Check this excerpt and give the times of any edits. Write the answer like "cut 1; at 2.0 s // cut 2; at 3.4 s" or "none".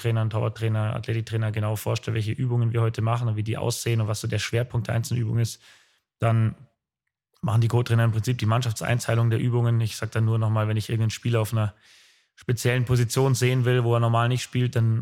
none